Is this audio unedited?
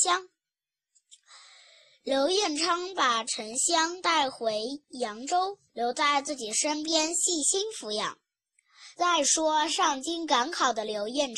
no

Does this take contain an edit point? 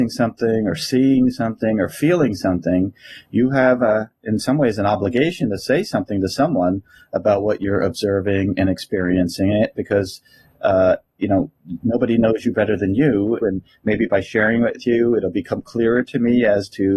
yes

